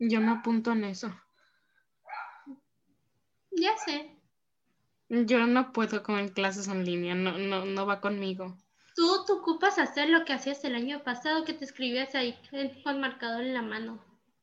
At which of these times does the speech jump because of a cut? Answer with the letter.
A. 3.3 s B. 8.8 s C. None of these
C